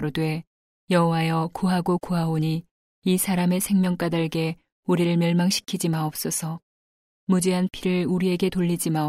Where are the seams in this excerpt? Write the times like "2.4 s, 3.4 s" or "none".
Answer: none